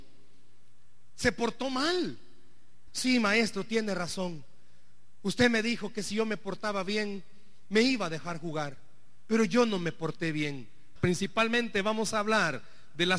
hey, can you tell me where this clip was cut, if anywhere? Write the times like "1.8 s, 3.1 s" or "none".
2.9 s, 11.0 s